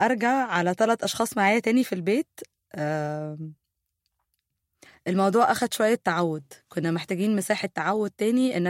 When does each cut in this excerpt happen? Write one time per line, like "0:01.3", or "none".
none